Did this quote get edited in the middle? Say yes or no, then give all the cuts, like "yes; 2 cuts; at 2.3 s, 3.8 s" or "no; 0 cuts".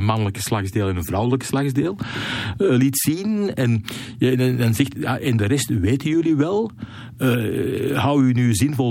no; 0 cuts